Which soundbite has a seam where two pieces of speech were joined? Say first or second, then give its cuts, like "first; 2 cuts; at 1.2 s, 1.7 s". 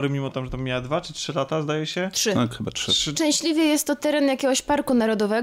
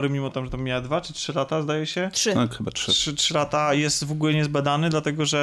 first; 1 cut; at 3.1 s